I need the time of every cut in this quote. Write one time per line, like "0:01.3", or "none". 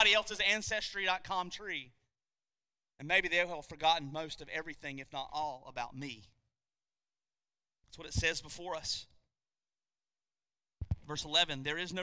none